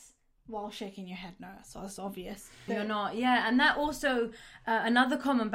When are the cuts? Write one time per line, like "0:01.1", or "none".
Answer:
0:02.7